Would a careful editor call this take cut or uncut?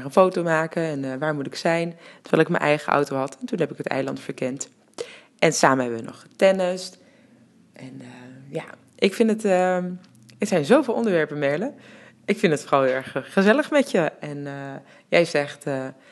uncut